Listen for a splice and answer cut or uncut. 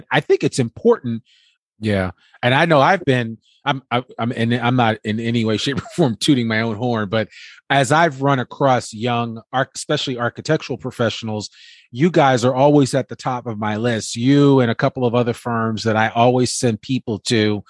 cut